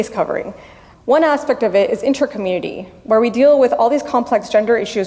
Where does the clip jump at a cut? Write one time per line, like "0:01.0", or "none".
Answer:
0:00.9